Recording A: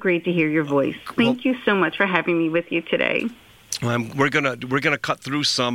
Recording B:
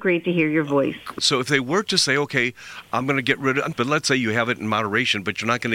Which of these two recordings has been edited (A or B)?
B